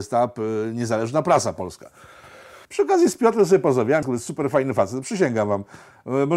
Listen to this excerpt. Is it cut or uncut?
cut